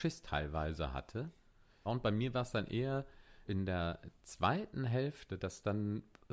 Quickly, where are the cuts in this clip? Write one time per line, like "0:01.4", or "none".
0:01.8
0:03.5